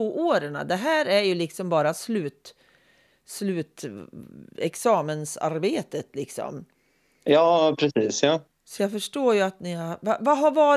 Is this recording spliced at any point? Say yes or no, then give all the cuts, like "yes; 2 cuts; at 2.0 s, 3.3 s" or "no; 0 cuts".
no; 0 cuts